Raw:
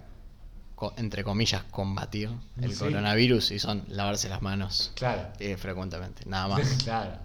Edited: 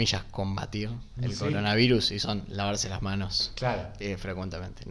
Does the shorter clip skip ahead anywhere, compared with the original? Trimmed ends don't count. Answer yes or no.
no